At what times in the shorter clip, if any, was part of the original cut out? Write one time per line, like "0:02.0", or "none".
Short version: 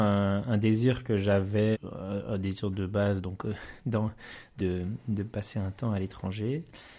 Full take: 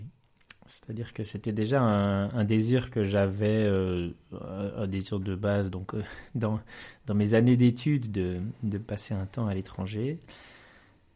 0:01.7
0:04.6